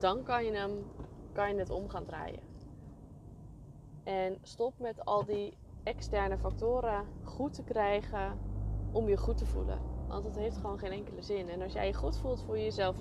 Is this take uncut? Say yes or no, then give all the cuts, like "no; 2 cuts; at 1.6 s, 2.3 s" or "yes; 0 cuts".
yes; 0 cuts